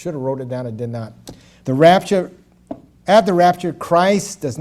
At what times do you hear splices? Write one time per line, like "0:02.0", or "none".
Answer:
0:01.6